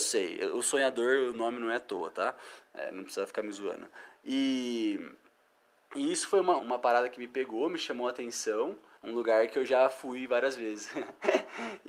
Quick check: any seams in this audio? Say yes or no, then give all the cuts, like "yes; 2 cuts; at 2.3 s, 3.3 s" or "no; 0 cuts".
yes; 2 cuts; at 6.6 s, 9.0 s